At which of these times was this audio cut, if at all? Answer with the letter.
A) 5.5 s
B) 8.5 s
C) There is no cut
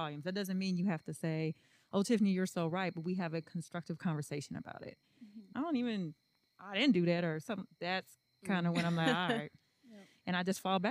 A